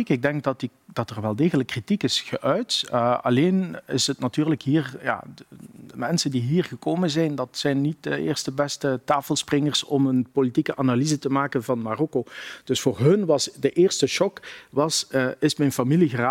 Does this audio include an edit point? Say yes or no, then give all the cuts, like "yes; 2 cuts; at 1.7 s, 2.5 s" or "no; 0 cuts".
no; 0 cuts